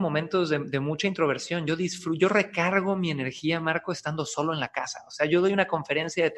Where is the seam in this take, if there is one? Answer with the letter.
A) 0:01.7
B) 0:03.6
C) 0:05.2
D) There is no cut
D